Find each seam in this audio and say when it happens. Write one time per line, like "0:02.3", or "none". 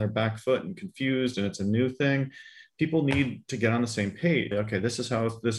0:04.5